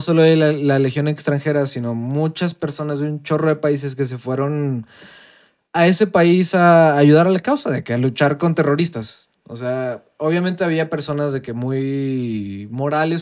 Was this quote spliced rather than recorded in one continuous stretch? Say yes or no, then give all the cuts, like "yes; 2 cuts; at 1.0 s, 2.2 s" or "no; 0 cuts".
no; 0 cuts